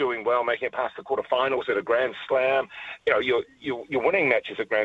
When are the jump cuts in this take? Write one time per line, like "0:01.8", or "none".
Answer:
none